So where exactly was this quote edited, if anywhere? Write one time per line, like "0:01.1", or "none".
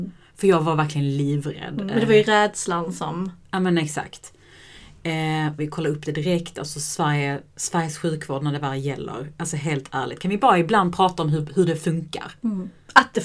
0:05.6